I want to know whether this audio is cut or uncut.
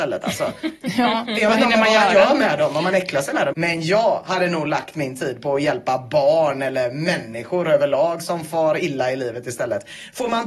cut